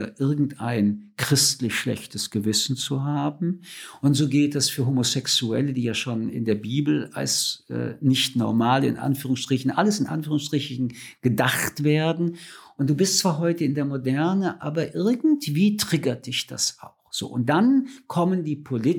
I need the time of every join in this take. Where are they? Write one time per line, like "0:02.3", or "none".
none